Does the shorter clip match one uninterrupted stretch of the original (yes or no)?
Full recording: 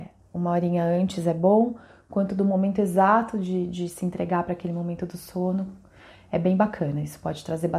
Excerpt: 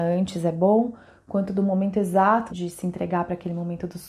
no